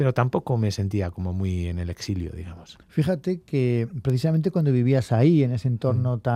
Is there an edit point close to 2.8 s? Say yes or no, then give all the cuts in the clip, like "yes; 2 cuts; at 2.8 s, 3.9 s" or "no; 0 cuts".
yes; 1 cut; at 2.8 s